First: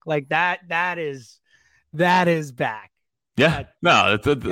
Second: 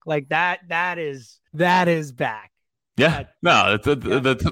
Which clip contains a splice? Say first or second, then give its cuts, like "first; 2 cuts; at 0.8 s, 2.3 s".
second; 1 cut; at 1.5 s